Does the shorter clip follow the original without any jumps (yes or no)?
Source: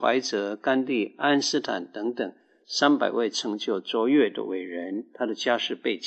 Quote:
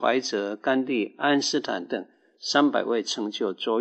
no